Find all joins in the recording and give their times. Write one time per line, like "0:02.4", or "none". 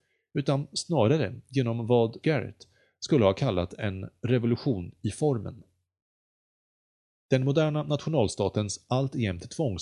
0:02.2